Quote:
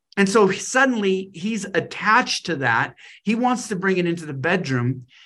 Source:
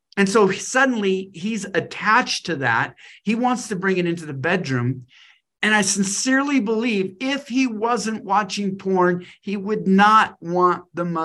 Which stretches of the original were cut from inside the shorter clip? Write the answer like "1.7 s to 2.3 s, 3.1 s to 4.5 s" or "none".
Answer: none